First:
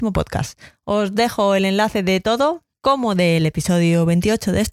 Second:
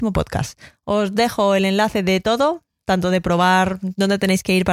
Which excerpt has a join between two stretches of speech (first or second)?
first